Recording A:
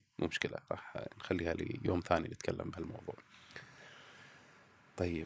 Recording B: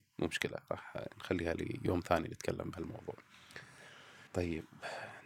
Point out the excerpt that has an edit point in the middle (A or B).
B